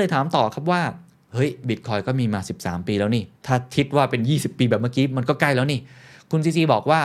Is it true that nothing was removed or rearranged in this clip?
no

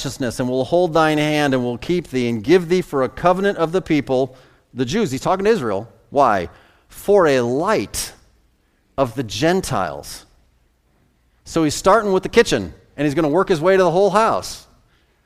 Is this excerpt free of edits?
yes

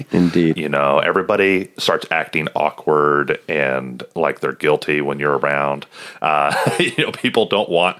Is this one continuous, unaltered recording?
yes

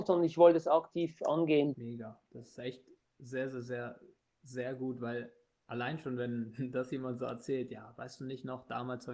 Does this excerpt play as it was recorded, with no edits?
no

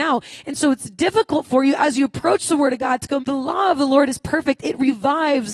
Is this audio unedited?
no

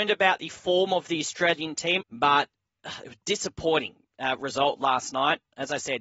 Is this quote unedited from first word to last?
no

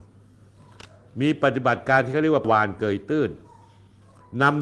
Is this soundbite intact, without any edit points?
yes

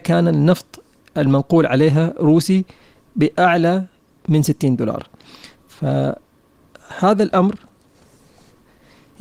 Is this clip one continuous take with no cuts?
yes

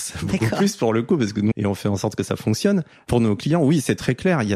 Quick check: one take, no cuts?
no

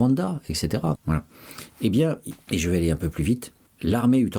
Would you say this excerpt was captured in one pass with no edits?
no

